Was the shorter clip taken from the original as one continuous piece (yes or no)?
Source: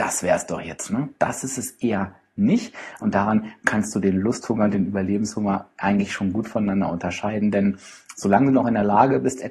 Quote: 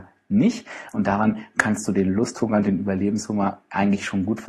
yes